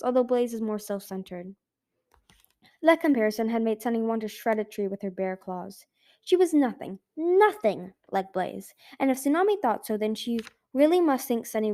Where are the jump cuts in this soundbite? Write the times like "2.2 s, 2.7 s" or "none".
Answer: none